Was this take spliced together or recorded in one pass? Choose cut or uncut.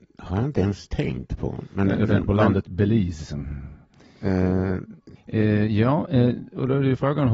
cut